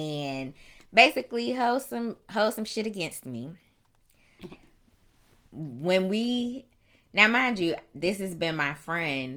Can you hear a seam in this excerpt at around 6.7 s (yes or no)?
no